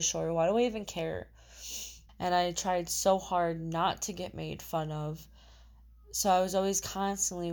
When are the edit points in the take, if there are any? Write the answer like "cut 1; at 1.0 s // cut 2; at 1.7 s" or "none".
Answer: cut 1; at 2.1 s